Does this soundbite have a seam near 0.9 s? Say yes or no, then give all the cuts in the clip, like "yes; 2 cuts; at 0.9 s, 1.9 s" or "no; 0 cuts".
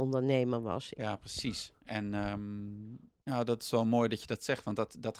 yes; 2 cuts; at 0.9 s, 3.2 s